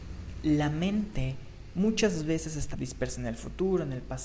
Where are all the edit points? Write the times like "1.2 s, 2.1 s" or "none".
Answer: 2.7 s